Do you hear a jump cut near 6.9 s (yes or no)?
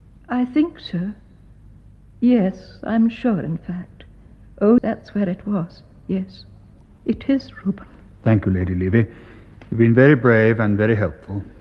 yes